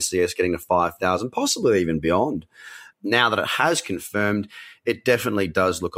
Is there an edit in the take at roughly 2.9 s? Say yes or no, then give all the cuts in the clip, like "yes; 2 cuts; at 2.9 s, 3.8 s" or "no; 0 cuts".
yes; 1 cut; at 2.9 s